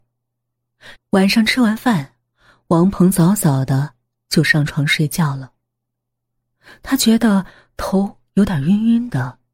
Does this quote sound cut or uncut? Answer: cut